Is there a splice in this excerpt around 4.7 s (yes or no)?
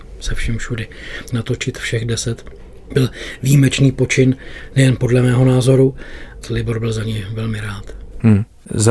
no